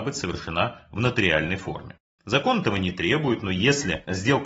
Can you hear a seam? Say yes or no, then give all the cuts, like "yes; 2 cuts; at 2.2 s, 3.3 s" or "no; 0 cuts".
yes; 1 cut; at 2.2 s